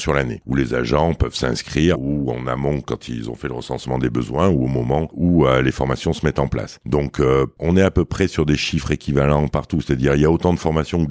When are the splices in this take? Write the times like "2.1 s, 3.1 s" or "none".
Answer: 1.9 s